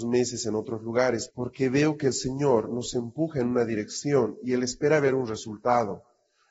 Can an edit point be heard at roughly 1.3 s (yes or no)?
yes